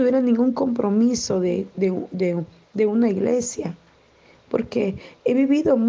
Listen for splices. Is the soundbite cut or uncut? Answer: uncut